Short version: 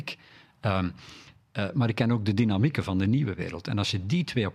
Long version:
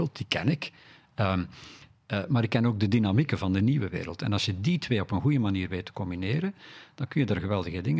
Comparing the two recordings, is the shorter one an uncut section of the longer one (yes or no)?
yes